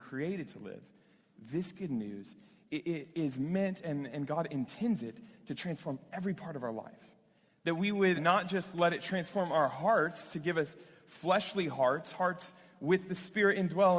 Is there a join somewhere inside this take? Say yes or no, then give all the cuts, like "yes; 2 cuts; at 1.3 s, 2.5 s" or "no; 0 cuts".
yes; 1 cut; at 8.2 s